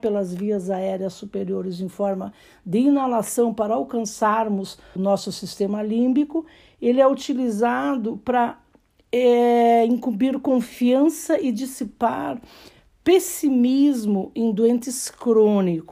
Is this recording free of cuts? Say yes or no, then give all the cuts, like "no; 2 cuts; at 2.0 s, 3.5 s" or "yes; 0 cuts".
no; 1 cut; at 5.0 s